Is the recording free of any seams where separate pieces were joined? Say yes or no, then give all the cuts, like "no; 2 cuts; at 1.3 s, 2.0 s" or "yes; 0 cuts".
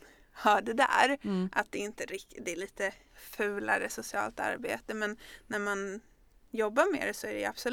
yes; 0 cuts